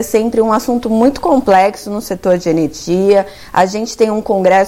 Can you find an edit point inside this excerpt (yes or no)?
no